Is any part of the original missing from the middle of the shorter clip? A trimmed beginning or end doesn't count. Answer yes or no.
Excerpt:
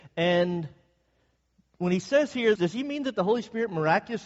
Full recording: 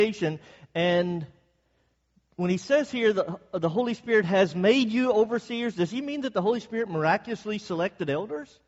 yes